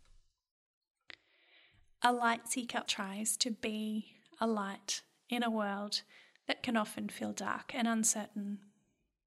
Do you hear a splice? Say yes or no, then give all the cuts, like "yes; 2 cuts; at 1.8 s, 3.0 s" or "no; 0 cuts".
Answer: yes; 1 cut; at 2.9 s